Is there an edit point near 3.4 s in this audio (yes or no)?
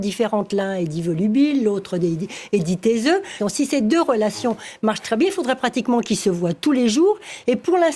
yes